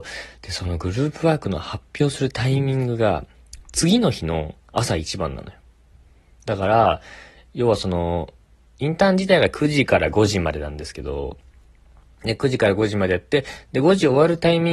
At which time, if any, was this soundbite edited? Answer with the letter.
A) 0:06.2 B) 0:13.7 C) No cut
C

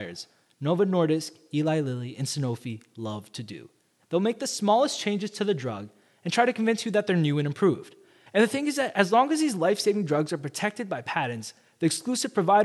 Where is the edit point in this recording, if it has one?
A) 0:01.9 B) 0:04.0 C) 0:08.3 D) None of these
C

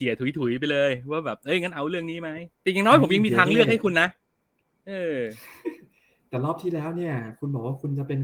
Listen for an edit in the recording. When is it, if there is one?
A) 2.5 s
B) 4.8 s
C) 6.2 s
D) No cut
A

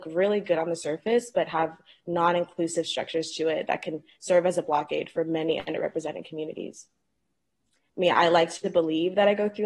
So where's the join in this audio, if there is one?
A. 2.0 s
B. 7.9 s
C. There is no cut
B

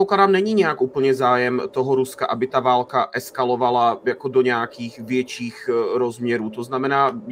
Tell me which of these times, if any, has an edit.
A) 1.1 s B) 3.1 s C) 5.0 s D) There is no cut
D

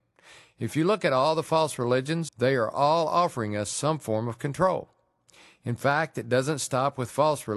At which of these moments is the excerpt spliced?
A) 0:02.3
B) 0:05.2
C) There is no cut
A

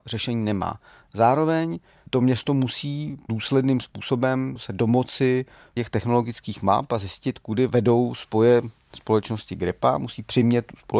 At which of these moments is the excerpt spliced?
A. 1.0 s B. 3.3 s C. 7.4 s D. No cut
D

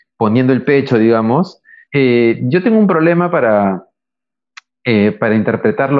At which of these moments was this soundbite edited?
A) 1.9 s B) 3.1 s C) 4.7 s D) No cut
A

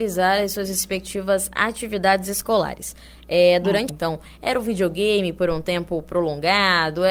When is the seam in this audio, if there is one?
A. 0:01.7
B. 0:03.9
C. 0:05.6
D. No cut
B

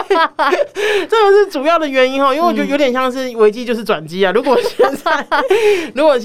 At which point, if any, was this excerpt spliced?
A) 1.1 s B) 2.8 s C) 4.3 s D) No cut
D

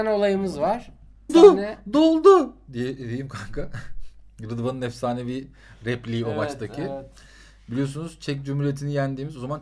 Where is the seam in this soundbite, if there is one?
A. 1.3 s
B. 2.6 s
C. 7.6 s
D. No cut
A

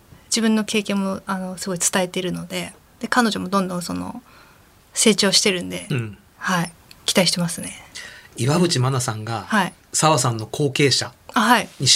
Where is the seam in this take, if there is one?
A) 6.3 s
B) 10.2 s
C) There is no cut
A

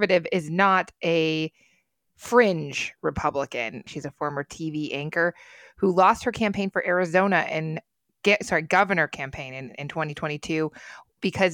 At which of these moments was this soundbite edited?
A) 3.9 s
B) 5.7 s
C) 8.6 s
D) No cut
A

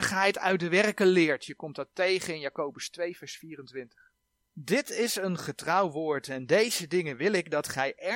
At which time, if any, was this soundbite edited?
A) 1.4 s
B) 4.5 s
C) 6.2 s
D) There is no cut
B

